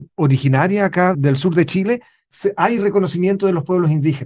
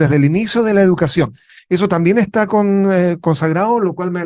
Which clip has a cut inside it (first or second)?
first